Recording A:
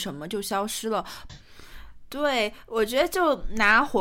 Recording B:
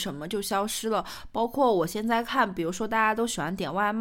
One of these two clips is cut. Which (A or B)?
A